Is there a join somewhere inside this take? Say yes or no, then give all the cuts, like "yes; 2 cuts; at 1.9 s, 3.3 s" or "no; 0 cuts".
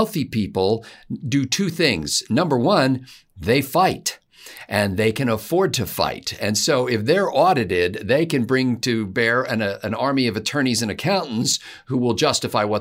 no; 0 cuts